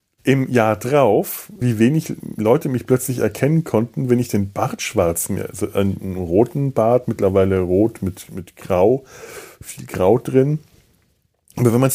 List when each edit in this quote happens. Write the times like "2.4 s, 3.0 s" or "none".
1.6 s, 6.0 s